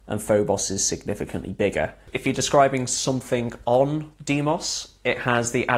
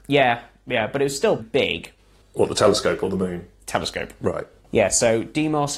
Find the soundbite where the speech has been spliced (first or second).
second